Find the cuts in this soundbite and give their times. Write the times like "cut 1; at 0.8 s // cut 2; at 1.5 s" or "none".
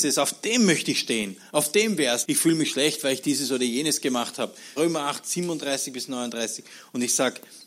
cut 1; at 2.2 s // cut 2; at 4.8 s